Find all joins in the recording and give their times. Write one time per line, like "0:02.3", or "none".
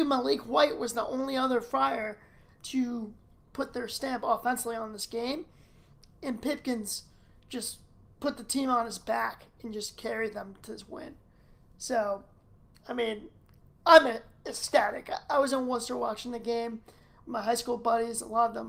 0:03.4